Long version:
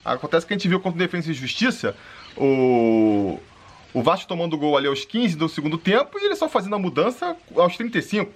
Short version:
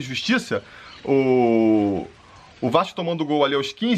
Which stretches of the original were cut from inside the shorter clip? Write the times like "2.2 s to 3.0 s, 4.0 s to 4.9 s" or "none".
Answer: none